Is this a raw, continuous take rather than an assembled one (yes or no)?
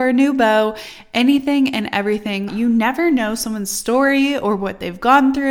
no